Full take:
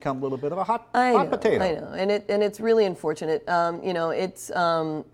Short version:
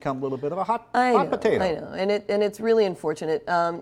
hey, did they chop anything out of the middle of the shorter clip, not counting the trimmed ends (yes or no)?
no